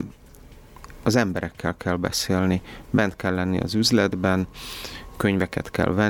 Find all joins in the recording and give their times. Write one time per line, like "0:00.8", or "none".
none